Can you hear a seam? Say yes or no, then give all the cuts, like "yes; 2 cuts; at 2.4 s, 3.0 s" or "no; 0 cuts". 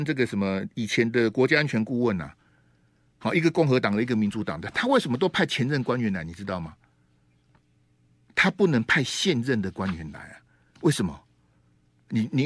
no; 0 cuts